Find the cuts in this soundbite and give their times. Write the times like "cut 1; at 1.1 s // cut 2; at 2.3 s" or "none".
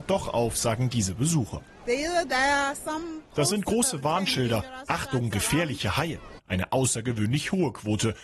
cut 1; at 6.4 s